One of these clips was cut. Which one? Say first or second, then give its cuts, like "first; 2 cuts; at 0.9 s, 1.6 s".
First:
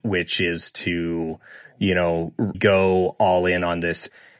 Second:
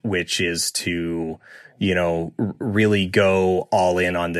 first; 1 cut; at 2.5 s